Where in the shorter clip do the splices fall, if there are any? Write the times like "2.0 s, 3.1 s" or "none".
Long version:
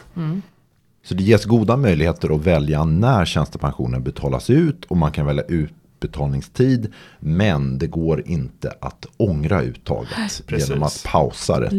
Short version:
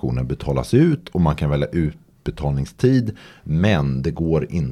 none